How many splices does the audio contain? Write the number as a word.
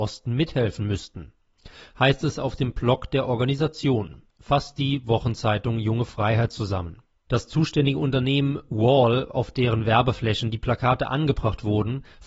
one